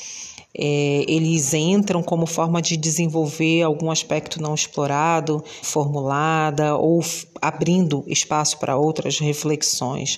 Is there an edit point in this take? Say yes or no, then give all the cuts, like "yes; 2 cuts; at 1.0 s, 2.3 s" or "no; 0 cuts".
yes; 1 cut; at 5.6 s